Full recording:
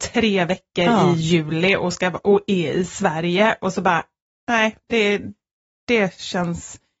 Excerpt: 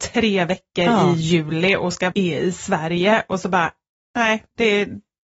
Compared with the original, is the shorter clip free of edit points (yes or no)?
no